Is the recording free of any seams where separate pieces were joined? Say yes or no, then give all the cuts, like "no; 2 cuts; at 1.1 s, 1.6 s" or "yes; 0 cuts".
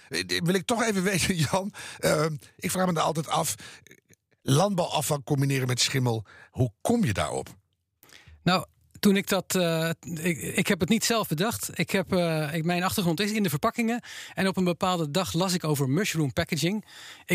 yes; 0 cuts